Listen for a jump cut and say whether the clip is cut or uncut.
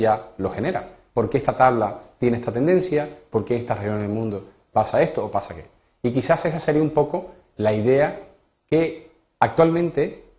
cut